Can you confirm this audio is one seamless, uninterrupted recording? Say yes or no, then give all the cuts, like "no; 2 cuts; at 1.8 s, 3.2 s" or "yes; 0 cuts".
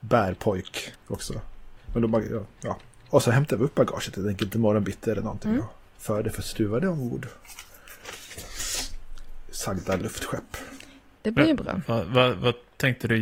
yes; 0 cuts